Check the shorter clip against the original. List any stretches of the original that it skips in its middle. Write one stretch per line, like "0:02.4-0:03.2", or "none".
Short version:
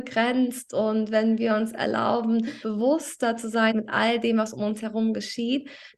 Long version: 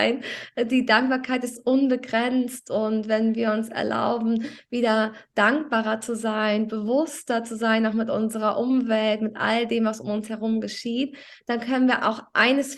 0:04.6-0:06.7
0:07.8-0:09.2